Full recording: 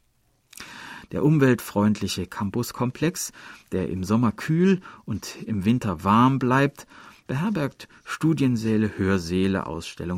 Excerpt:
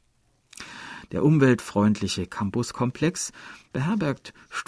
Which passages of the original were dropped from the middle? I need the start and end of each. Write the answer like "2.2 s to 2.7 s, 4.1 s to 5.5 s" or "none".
3.6 s to 7.2 s